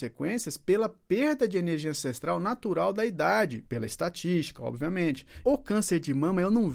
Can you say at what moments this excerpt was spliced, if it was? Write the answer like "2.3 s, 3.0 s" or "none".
3.6 s, 5.4 s